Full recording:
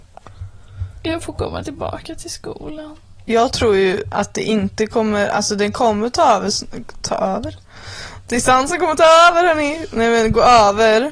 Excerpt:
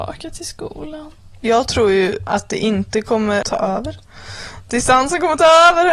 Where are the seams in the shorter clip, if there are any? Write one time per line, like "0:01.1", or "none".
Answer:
0:03.4